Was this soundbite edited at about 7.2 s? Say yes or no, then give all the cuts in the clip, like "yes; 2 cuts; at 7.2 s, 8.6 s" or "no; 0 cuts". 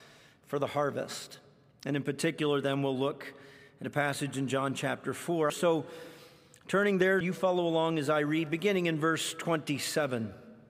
yes; 2 cuts; at 5.5 s, 7.2 s